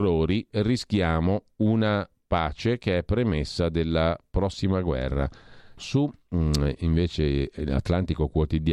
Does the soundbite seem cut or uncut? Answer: cut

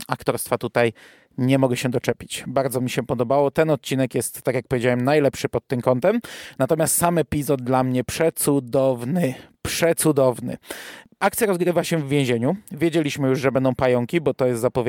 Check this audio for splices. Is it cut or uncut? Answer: uncut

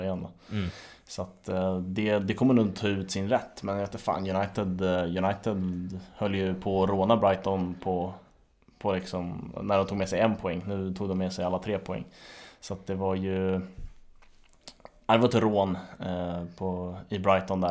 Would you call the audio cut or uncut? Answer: uncut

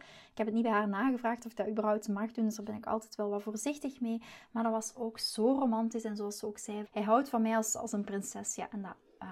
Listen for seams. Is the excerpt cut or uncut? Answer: cut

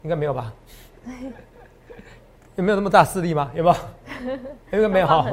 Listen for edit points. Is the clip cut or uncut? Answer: uncut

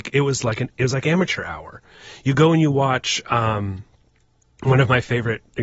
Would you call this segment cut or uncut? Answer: uncut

